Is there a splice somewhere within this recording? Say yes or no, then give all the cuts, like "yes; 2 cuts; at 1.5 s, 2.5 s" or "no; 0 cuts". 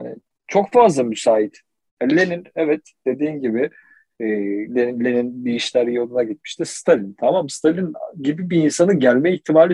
no; 0 cuts